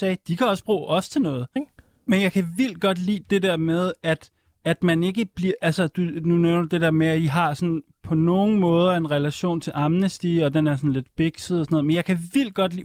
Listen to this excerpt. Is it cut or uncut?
cut